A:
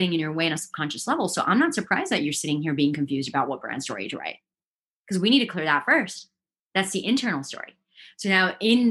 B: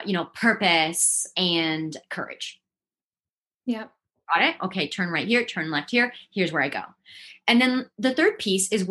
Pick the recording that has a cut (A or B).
B